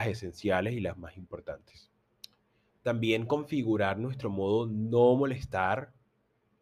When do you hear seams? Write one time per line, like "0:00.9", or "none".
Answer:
0:02.7